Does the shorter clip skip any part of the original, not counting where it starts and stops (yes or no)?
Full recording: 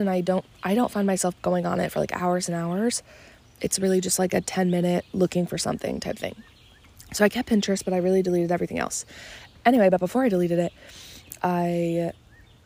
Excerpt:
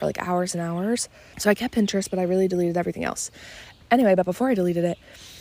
yes